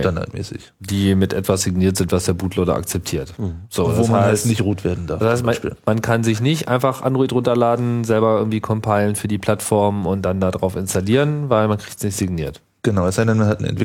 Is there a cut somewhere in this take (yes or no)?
no